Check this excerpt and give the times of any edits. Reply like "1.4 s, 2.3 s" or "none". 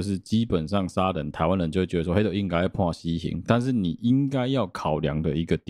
none